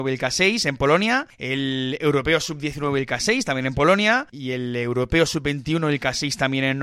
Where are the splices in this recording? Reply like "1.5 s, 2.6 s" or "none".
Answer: 4.3 s

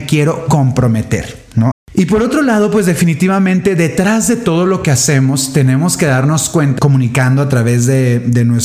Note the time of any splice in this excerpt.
1.7 s, 6.8 s

